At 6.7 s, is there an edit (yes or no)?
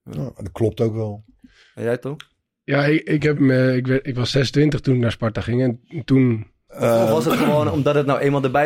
yes